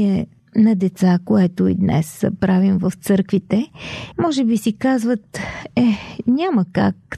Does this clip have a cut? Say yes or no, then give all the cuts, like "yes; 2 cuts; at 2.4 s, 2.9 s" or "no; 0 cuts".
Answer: yes; 1 cut; at 4.1 s